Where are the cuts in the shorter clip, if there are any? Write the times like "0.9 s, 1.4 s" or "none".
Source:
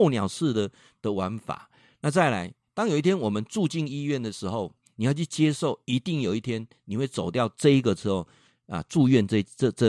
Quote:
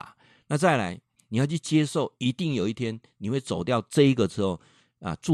1.2 s